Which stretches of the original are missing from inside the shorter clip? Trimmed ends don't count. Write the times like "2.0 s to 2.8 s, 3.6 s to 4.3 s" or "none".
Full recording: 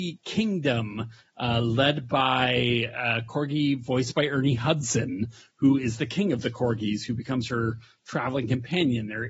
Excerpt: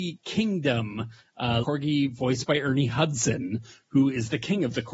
1.6 s to 3.3 s